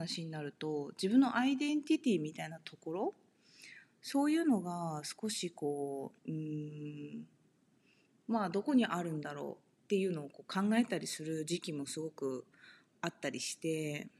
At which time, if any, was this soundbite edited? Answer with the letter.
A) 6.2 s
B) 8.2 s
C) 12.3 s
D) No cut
A